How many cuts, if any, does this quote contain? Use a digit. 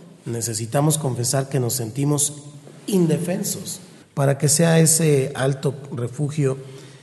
1